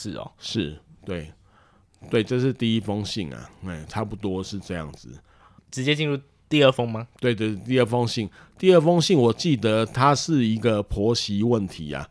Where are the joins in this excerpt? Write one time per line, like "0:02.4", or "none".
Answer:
0:05.6